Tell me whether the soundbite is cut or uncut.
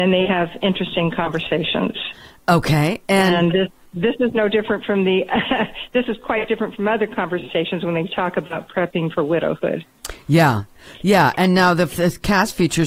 uncut